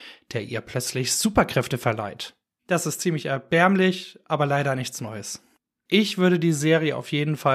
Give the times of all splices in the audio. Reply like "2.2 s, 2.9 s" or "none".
2.6 s